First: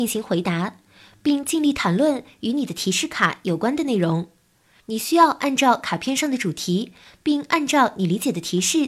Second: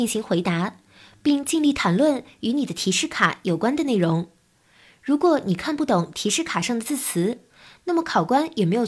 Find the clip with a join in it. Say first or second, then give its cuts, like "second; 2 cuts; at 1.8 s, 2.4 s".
first; 1 cut; at 4.8 s